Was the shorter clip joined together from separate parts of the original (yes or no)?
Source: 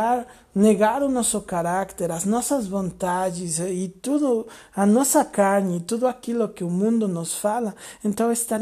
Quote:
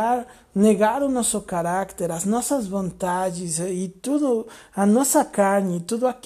no